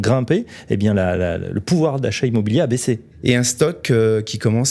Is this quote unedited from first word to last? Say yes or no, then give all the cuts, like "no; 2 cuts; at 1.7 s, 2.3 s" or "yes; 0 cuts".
no; 1 cut; at 3.1 s